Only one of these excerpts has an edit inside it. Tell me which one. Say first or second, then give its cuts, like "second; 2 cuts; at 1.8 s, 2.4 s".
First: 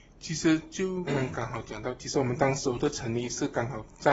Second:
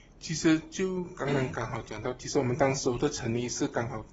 first; 1 cut; at 1.1 s